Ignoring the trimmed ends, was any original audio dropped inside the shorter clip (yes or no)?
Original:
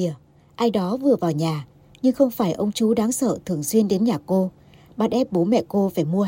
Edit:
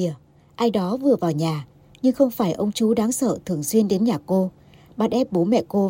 no